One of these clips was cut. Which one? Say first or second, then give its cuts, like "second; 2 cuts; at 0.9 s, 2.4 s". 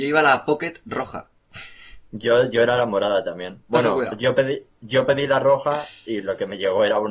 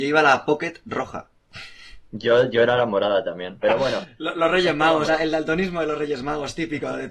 second; 2 cuts; at 3.6 s, 5.1 s